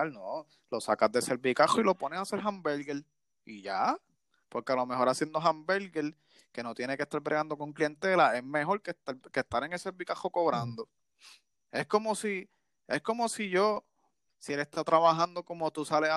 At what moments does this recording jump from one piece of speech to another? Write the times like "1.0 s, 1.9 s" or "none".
11.5 s, 14.3 s